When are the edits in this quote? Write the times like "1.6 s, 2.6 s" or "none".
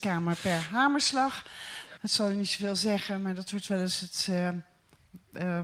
2.0 s